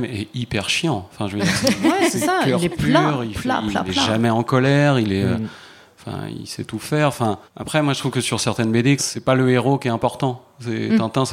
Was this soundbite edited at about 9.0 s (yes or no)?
yes